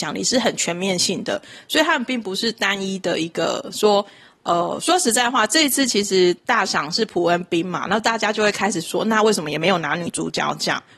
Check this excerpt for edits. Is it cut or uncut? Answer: uncut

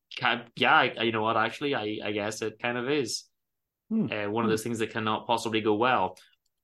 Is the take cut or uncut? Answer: cut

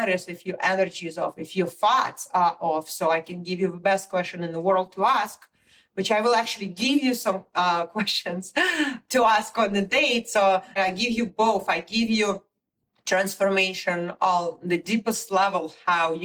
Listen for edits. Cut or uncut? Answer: cut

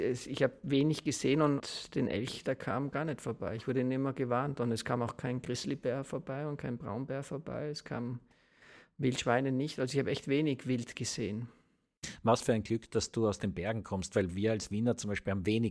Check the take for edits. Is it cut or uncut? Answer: uncut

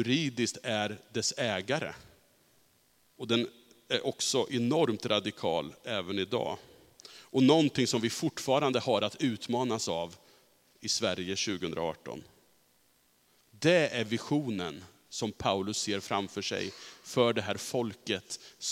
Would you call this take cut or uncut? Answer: cut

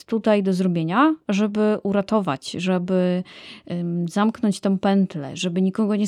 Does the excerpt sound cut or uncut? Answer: uncut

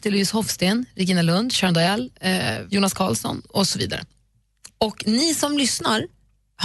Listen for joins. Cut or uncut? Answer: cut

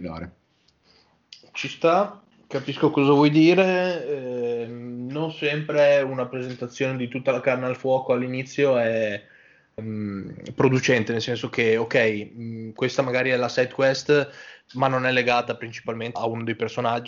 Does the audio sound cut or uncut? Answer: cut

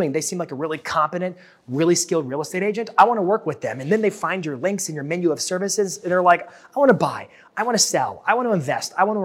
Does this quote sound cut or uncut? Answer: uncut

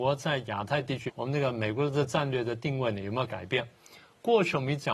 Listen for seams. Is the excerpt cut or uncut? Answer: cut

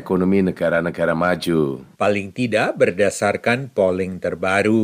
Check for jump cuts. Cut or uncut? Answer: cut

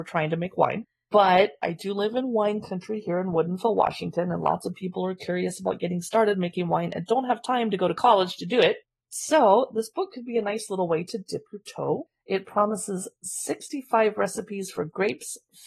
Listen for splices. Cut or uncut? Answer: uncut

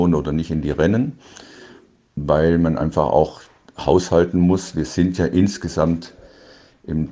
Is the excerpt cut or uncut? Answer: uncut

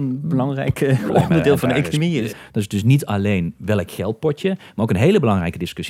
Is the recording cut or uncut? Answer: cut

